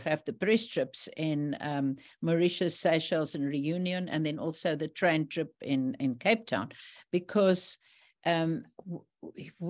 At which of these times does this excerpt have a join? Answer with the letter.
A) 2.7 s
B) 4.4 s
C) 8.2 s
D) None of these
D